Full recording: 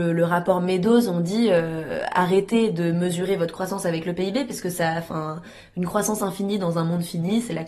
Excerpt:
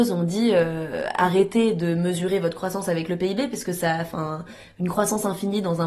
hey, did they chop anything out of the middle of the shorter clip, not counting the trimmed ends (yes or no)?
no